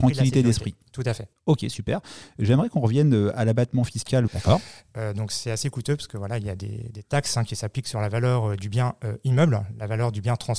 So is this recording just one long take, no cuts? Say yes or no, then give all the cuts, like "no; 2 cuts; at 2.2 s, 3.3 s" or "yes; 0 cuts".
no; 1 cut; at 4.3 s